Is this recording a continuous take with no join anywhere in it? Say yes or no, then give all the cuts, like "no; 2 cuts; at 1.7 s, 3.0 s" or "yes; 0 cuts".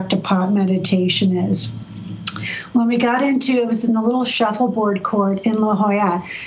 yes; 0 cuts